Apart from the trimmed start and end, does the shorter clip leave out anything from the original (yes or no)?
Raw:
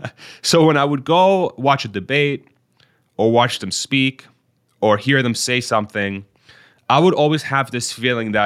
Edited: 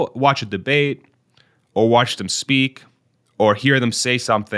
no